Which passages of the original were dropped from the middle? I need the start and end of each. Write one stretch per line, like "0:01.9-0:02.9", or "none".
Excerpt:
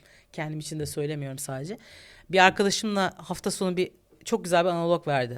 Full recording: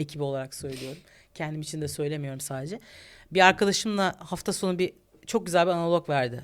none